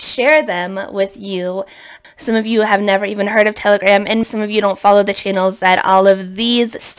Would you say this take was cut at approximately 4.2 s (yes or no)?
yes